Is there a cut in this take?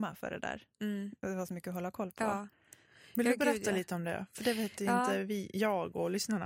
no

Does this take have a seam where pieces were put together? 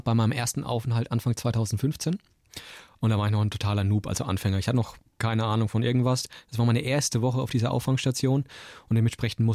no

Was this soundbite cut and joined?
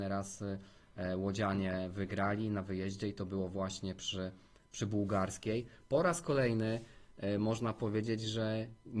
no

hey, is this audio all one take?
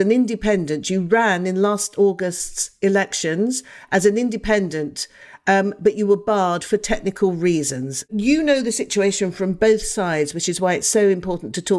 yes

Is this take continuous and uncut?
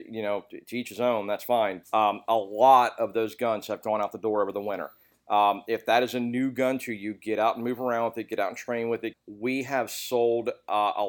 no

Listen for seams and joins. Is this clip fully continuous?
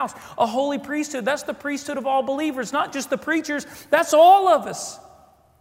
yes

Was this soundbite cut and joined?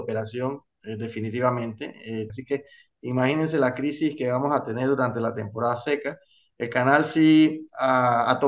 yes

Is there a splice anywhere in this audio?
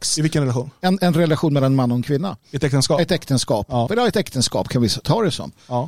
yes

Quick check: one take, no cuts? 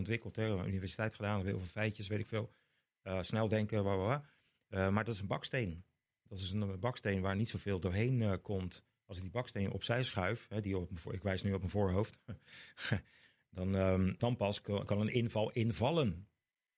no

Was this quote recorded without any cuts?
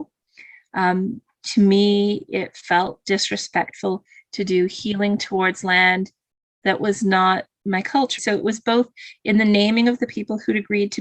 no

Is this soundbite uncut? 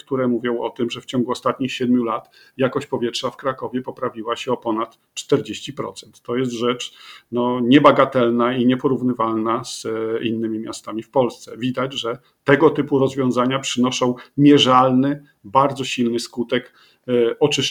yes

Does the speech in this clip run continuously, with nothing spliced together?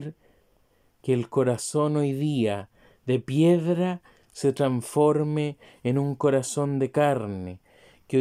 yes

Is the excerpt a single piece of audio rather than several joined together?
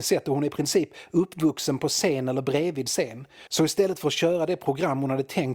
no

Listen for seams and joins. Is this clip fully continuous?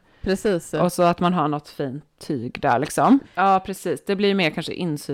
no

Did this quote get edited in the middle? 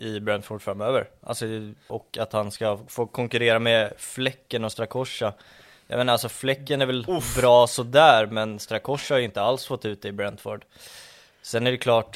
yes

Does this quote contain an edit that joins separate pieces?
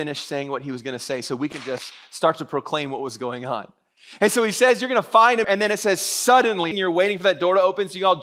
yes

